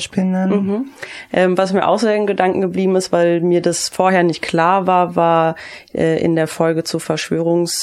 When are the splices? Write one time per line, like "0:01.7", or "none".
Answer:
none